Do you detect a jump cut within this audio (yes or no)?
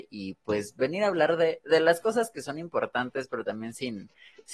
no